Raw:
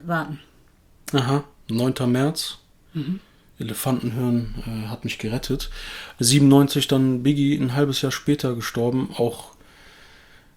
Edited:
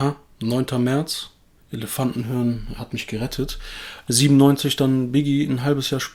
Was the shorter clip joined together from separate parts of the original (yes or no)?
yes